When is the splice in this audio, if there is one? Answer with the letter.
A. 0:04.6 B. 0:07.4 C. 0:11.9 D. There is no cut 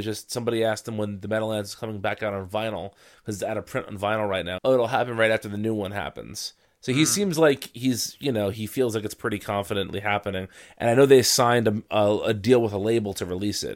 A